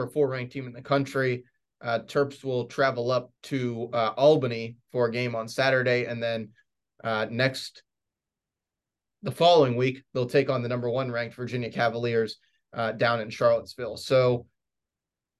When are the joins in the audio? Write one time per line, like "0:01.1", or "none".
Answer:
0:03.4